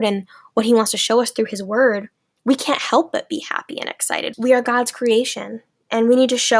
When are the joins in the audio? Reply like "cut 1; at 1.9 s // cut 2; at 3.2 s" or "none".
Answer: cut 1; at 4.3 s